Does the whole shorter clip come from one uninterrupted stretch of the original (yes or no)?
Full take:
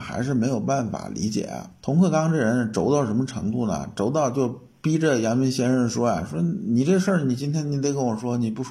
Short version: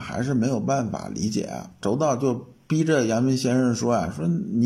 no